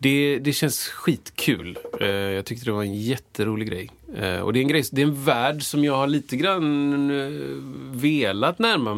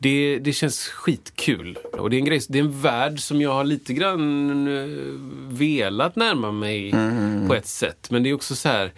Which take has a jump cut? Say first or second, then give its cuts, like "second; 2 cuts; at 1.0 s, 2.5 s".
second; 1 cut; at 2.0 s